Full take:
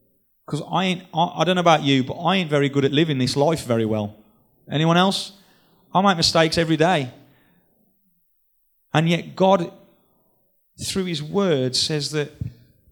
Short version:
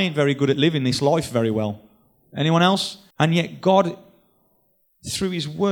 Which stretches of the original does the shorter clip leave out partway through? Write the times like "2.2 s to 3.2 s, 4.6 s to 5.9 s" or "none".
5.5 s to 8.8 s